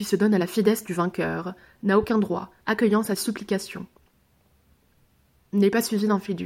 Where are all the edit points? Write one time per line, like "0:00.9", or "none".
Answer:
0:02.6